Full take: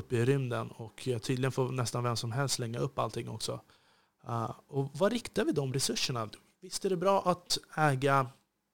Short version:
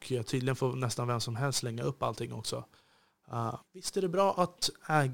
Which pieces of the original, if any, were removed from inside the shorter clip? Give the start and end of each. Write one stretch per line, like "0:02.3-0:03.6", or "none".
0:04.6-0:06.5

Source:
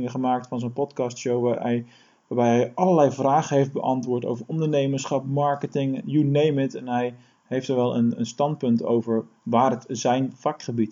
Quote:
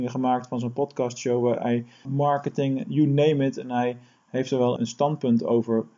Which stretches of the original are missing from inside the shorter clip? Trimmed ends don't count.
0:02.0-0:05.2
0:07.9-0:08.2

